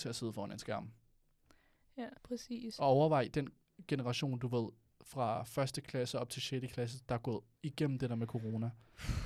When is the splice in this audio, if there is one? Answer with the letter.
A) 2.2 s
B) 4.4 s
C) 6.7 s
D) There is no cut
A